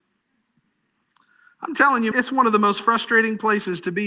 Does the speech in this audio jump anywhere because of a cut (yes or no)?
yes